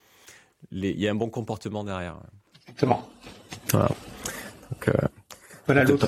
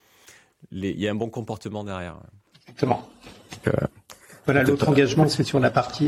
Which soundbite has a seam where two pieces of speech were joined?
second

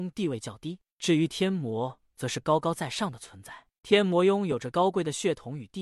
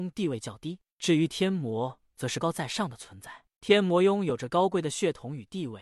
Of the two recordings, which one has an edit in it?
second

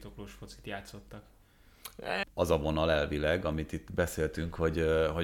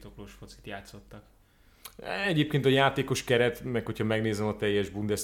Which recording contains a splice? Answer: first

